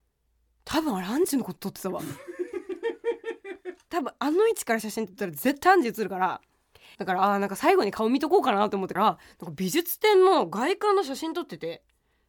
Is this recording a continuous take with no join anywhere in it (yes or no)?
no